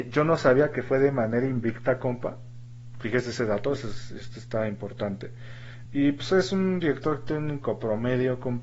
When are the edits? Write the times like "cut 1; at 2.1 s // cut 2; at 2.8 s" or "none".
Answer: cut 1; at 5.9 s